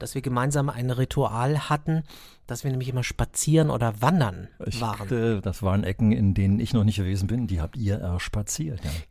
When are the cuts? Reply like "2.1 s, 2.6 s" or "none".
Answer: 5.1 s